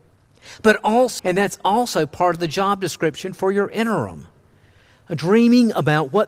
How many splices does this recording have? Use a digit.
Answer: 1